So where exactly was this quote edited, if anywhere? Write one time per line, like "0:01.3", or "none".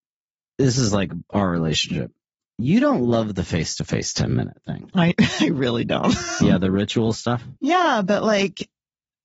0:06.4